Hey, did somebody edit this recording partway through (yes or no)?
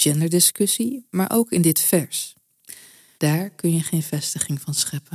yes